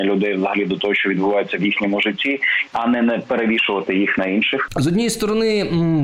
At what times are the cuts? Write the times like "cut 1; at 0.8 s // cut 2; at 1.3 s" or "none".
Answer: cut 1; at 2.7 s